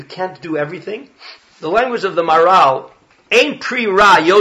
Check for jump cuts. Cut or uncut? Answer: cut